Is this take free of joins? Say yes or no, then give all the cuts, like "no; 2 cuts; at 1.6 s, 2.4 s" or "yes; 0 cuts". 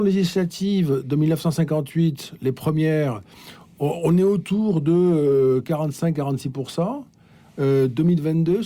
yes; 0 cuts